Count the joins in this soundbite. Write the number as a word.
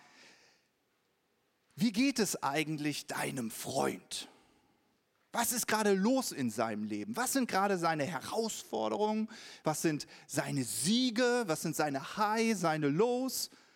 zero